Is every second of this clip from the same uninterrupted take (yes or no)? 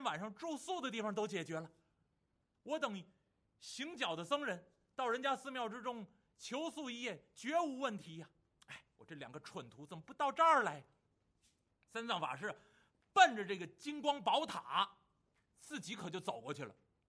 yes